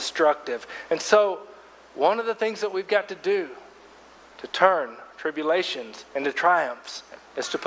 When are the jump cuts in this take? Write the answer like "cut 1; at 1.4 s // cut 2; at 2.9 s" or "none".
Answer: cut 1; at 6.1 s